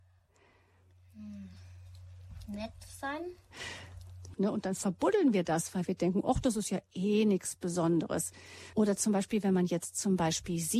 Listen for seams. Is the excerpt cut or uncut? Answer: cut